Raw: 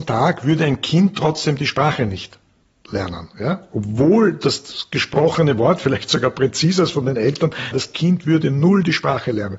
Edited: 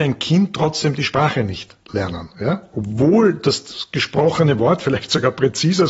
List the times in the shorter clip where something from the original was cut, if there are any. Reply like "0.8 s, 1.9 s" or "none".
1.8 s